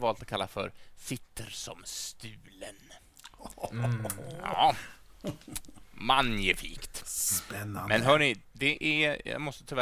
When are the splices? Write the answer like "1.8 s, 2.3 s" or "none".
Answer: 8.4 s